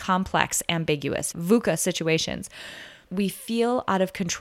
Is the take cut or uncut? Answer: cut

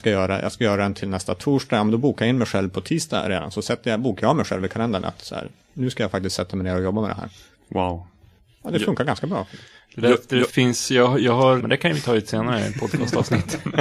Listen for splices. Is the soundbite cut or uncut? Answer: cut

